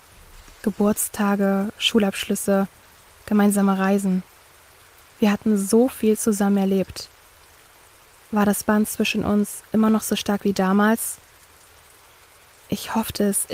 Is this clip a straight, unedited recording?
yes; 0 cuts

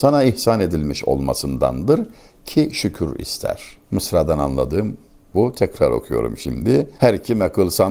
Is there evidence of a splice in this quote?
no; 0 cuts

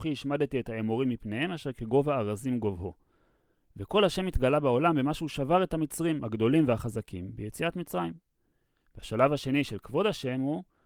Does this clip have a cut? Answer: no; 0 cuts

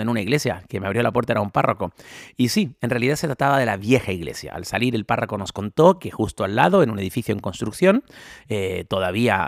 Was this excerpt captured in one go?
yes; 0 cuts

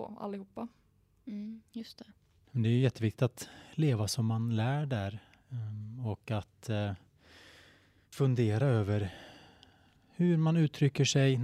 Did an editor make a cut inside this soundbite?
yes; 2 cuts; at 2.4 s, 8.1 s

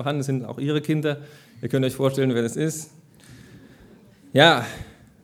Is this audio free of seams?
yes; 0 cuts

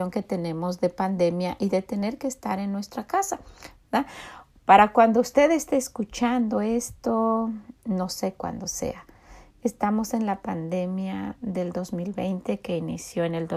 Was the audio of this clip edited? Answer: no; 0 cuts

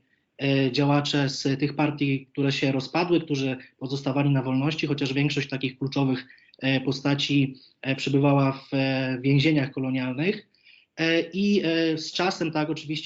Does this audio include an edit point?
no; 0 cuts

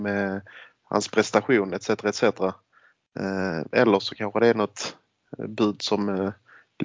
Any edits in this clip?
no; 0 cuts

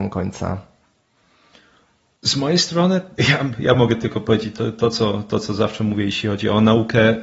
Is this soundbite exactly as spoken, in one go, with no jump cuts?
yes; 0 cuts

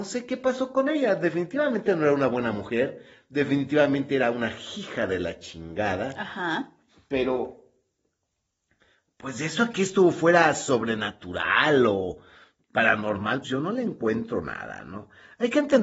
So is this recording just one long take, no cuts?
no; 1 cut; at 13.4 s

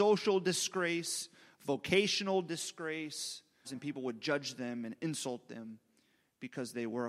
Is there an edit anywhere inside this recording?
yes; 1 cut; at 3.6 s

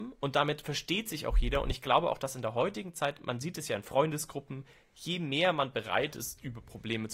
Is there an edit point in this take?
no; 0 cuts

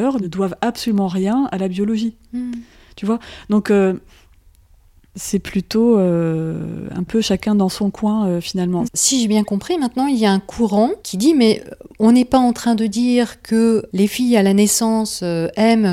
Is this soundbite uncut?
no; 2 cuts; at 8.8 s, 11.0 s

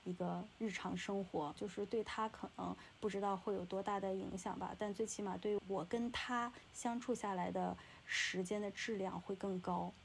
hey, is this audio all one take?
no; 2 cuts; at 1.6 s, 5.6 s

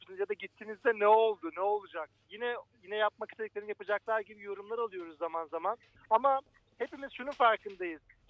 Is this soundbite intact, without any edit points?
no; 1 cut; at 5.9 s

